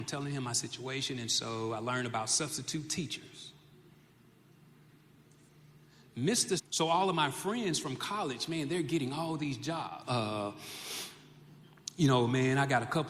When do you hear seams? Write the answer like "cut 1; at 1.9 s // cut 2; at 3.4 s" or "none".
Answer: cut 1; at 6.6 s // cut 2; at 10.0 s